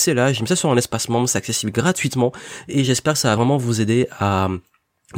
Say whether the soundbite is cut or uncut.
uncut